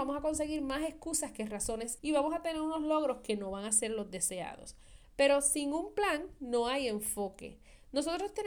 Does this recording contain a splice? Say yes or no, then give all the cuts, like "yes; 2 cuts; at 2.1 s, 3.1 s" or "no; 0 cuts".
yes; 2 cuts; at 2.0 s, 5.0 s